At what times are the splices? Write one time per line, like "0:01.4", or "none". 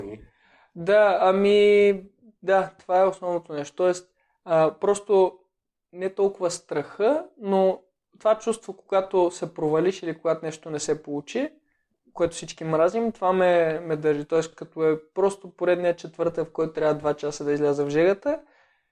none